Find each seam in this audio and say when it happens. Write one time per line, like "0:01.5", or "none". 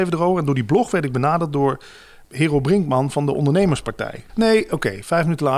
0:02.2
0:04.3

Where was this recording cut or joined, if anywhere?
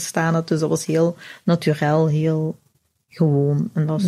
none

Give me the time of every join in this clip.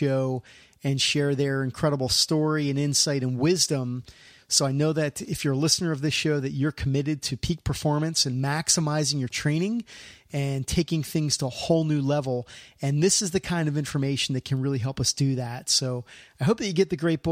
0:04.4

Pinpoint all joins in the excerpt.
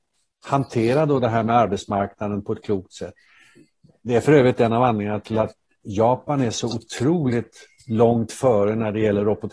none

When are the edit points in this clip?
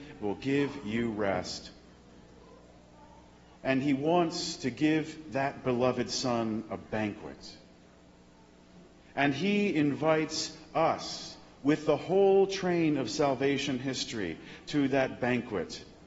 0:03.5

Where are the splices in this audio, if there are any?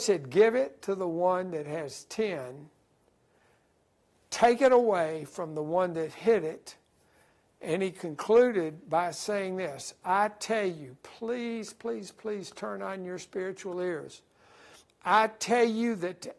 0:12.1

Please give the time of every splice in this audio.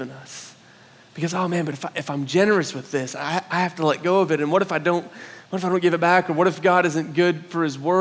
none

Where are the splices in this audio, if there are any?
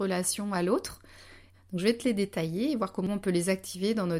0:01.5

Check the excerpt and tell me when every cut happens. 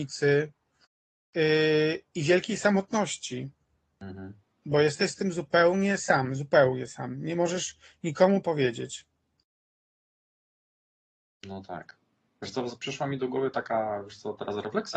none

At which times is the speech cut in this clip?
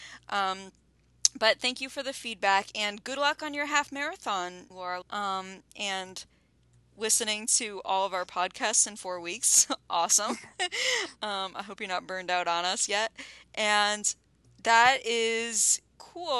0:05.0
0:06.8

